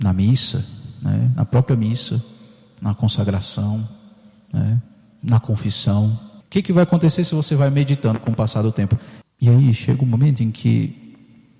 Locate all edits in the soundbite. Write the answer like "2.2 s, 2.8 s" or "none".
6.4 s, 9.2 s